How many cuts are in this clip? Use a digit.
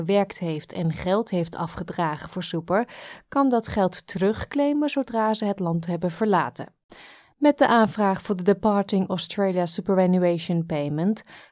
0